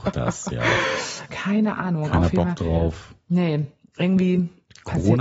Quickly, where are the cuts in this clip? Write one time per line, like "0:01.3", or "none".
0:01.3